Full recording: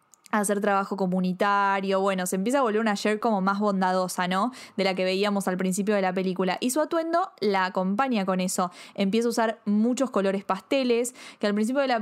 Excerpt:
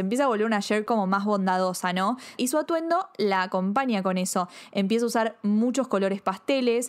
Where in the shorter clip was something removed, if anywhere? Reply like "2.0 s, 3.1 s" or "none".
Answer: 2.4 s